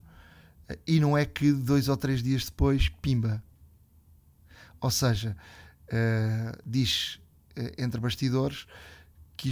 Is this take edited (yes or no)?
no